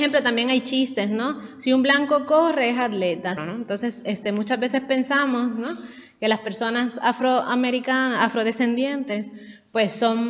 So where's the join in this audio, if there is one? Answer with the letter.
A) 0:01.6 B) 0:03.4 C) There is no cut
B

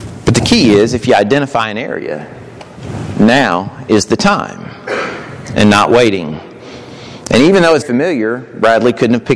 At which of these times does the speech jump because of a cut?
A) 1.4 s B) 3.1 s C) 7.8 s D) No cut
C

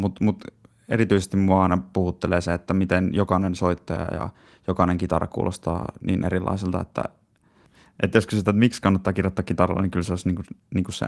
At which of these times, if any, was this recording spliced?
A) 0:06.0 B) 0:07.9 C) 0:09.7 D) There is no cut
A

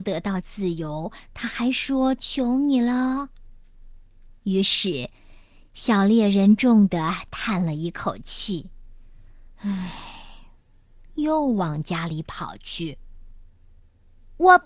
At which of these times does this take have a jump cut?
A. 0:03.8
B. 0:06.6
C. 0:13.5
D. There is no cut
B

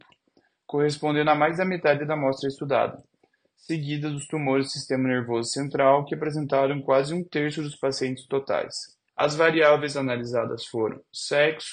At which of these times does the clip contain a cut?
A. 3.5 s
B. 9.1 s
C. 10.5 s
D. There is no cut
B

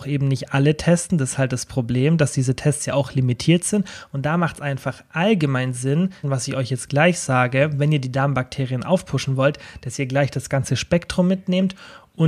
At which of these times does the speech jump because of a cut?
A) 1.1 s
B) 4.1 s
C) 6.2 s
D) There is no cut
C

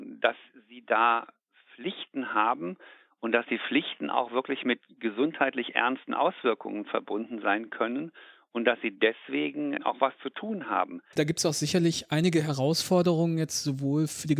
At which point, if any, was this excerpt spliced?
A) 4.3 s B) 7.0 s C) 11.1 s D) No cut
C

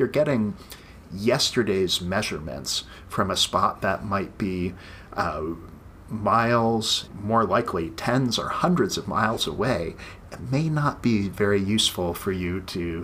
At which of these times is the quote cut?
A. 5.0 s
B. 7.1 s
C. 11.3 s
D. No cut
B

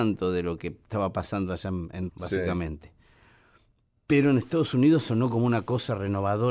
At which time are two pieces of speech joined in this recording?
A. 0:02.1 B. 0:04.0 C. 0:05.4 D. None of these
A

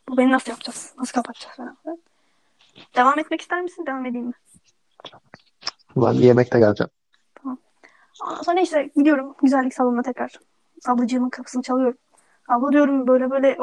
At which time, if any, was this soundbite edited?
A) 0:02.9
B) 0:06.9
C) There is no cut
A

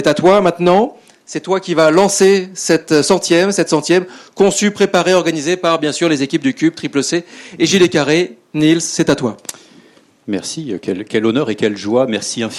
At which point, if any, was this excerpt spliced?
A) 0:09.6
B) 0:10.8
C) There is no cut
C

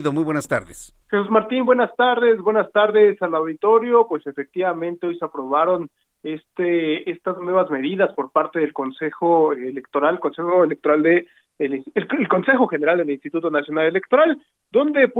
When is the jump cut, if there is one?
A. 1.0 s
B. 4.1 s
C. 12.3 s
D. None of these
A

